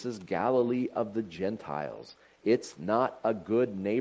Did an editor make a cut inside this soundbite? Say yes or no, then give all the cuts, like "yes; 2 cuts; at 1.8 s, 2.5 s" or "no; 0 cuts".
no; 0 cuts